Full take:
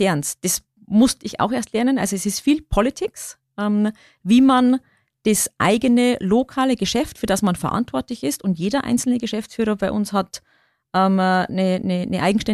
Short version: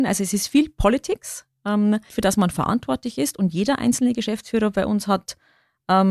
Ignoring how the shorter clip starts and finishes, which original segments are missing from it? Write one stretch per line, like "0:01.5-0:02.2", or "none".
0:04.0-0:07.1